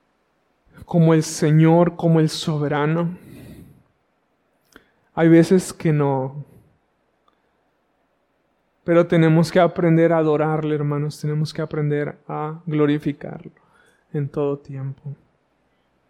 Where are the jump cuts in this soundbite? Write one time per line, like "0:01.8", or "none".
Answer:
none